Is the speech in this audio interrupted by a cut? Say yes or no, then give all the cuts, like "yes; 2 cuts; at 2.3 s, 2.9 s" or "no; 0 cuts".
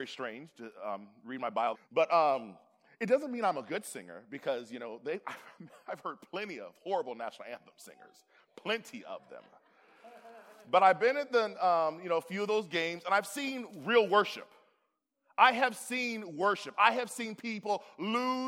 yes; 1 cut; at 1.7 s